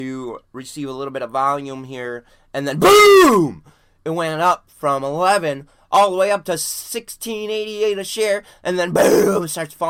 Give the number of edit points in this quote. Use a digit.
0